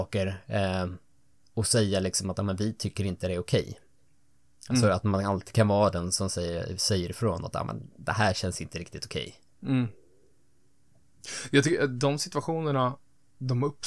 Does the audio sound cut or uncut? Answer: uncut